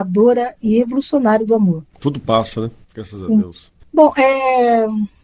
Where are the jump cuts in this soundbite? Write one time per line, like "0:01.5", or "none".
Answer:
0:01.9
0:03.8